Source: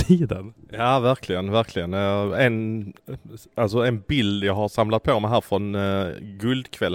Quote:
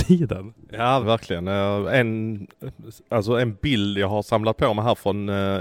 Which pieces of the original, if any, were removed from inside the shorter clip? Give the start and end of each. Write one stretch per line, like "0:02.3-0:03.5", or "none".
0:01.0-0:01.5